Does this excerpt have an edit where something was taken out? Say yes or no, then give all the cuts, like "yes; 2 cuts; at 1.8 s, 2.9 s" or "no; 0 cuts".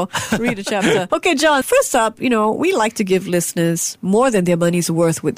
no; 0 cuts